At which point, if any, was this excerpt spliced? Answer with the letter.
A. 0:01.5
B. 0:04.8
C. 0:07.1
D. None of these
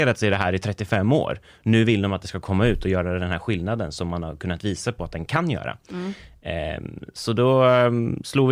D